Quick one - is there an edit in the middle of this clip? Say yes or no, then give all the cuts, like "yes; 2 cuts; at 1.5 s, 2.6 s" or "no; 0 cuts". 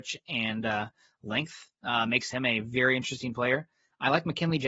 no; 0 cuts